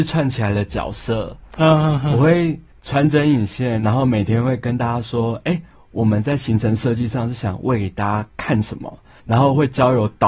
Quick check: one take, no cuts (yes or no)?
yes